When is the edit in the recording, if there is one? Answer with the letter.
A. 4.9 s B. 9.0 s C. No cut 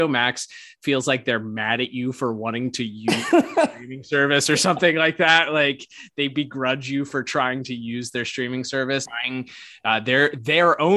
B